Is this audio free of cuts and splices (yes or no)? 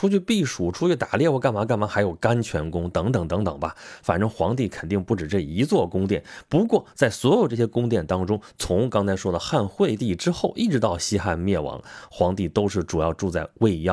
yes